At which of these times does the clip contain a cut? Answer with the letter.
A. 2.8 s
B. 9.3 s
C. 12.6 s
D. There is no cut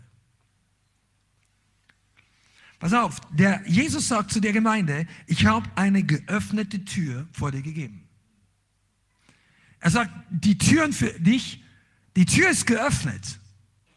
D